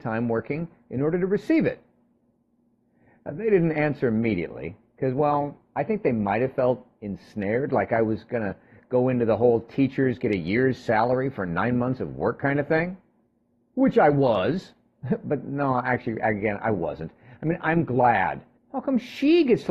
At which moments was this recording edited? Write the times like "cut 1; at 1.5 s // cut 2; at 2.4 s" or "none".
cut 1; at 18.6 s